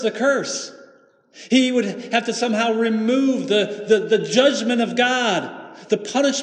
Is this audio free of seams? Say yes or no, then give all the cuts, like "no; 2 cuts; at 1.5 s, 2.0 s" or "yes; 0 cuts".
yes; 0 cuts